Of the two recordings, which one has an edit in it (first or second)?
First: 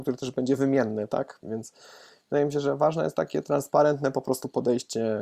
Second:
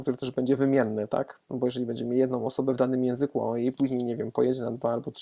first